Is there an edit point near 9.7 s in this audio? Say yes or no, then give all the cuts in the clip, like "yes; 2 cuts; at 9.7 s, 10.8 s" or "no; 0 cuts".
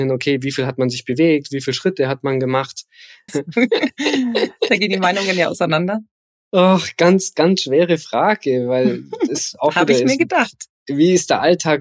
no; 2 cuts; at 3.3 s, 7.3 s